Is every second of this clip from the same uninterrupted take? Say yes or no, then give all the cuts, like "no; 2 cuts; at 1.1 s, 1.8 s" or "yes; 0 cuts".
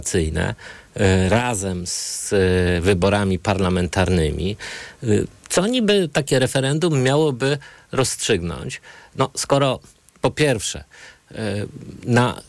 yes; 0 cuts